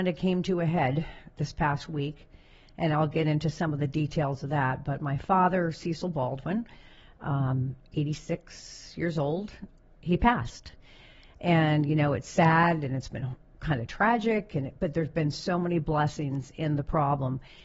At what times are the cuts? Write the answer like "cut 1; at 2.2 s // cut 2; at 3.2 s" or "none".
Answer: none

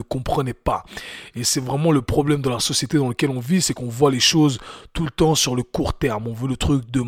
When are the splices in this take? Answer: none

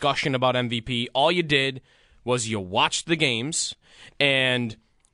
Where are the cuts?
none

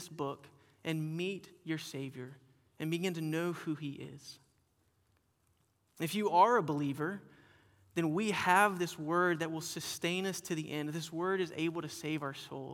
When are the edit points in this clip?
none

